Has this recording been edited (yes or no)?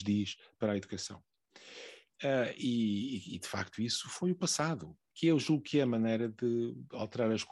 yes